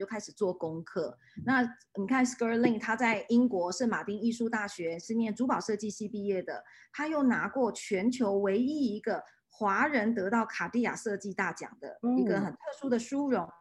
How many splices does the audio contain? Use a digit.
0